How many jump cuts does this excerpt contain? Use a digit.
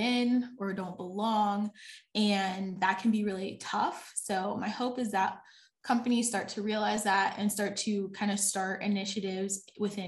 0